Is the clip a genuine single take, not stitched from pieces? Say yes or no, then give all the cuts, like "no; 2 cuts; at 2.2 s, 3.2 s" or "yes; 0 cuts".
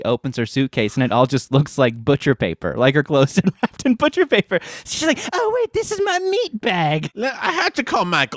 yes; 0 cuts